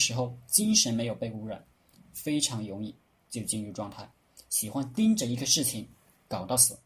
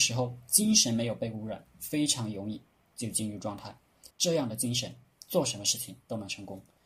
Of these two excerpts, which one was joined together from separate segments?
second; 2 cuts; at 1.7 s, 4.1 s

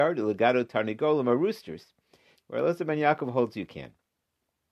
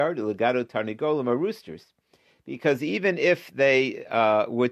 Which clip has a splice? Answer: first; 1 cut; at 2.4 s

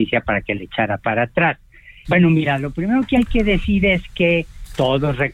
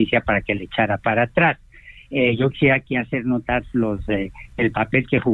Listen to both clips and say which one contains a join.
first; 1 cut; at 2.0 s

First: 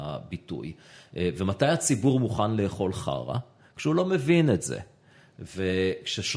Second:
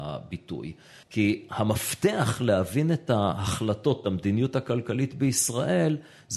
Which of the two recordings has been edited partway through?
second; 1 cut; at 1.0 s

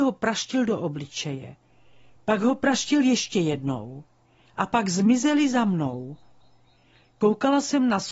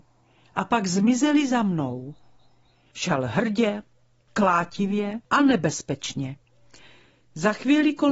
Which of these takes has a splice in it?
second; 2 cuts; at 2.9 s, 5.2 s

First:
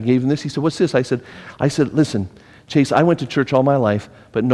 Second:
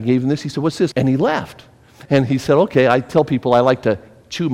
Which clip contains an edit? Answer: second; 2 cuts; at 0.9 s, 2.1 s

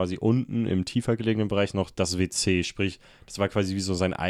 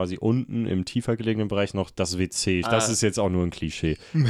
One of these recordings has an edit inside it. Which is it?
second; 1 cut; at 2.6 s

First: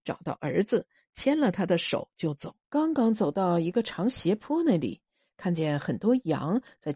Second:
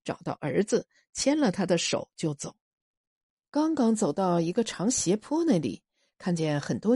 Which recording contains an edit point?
first; 1 cut; at 2.6 s

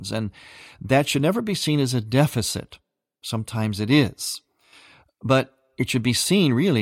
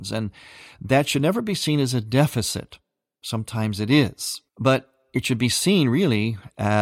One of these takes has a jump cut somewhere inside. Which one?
second; 1 cut; at 4.5 s

